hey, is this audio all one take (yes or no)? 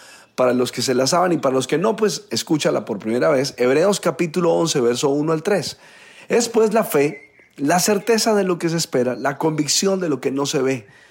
yes